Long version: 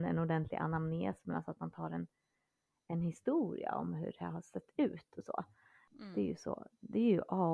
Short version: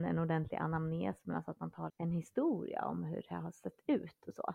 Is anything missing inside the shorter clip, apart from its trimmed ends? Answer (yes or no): yes